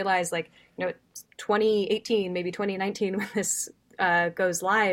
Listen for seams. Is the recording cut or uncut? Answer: cut